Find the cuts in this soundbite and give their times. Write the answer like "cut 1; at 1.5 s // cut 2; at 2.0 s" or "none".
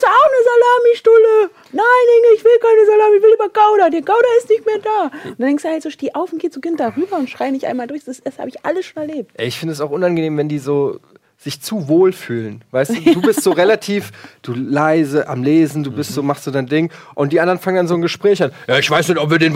none